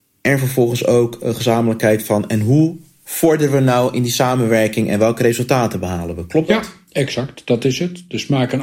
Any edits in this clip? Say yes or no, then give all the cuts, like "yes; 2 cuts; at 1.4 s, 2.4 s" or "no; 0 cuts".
no; 0 cuts